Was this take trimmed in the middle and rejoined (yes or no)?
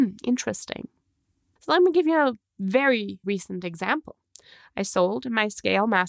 yes